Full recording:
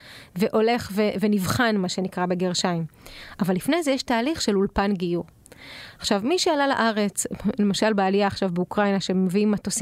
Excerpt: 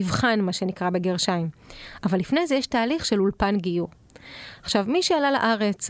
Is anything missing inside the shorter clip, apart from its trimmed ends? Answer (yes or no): no